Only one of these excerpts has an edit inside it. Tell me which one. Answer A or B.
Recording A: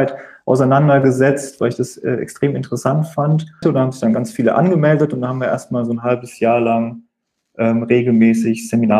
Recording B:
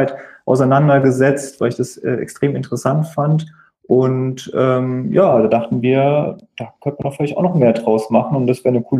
A